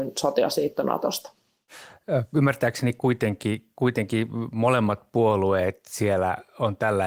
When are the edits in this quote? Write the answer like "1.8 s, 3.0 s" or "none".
none